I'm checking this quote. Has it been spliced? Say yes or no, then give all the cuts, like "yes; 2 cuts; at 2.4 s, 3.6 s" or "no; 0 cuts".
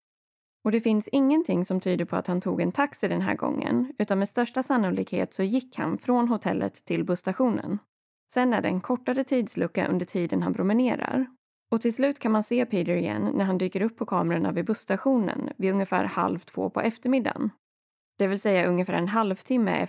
yes; 1 cut; at 8.2 s